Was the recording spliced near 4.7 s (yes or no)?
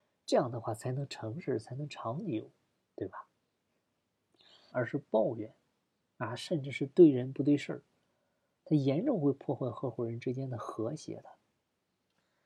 yes